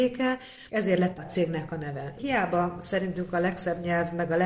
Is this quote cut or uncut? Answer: cut